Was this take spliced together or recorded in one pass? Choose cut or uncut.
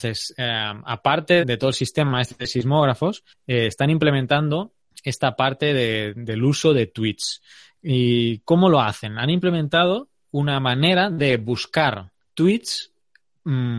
cut